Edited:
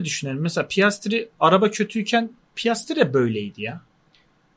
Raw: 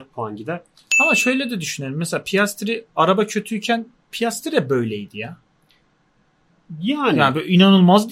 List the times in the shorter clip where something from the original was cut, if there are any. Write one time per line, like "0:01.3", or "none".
none